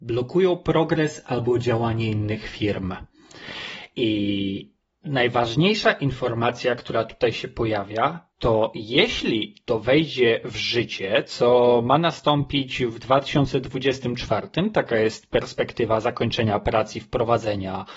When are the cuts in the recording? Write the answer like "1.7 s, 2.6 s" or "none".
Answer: 8.3 s